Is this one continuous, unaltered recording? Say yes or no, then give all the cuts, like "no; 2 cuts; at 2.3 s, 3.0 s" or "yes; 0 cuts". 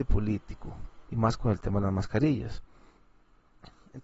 no; 1 cut; at 1.0 s